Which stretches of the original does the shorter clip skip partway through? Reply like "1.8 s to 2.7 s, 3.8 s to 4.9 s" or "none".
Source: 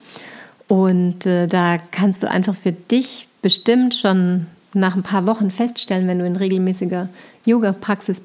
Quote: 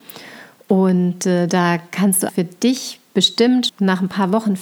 2.3 s to 2.6 s, 4.0 s to 4.6 s